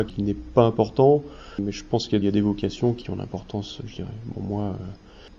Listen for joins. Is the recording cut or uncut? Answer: cut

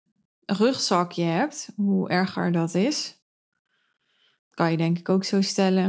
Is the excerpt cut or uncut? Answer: uncut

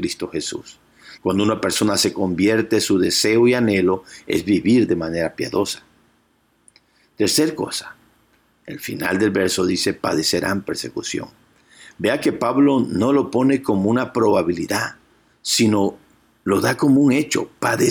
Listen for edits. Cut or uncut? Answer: cut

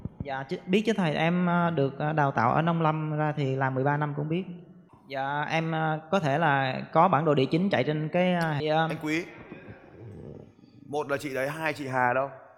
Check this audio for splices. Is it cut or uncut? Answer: cut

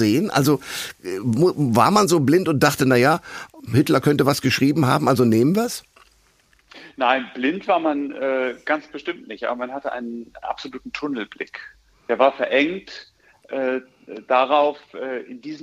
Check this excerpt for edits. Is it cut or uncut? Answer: uncut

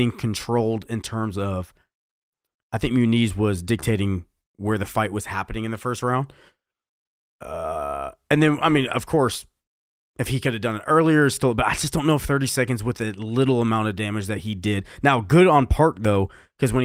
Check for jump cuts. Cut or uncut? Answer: uncut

